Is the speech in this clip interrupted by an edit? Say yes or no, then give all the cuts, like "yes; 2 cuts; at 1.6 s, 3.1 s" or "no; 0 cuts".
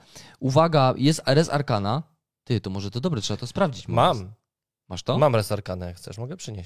no; 0 cuts